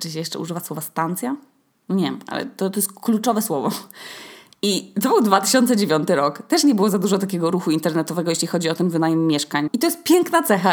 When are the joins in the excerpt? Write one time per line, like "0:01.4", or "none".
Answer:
0:09.7